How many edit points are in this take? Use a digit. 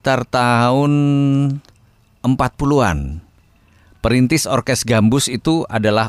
0